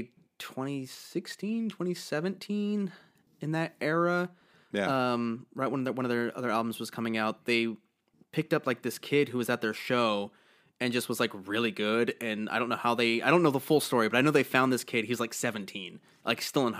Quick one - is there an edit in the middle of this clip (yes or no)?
no